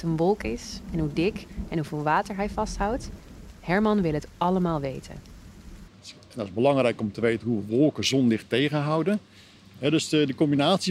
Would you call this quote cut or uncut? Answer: cut